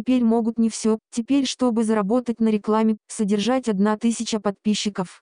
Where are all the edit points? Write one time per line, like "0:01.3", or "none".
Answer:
0:01.0
0:03.0